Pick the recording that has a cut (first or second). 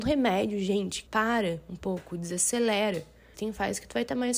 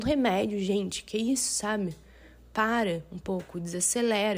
first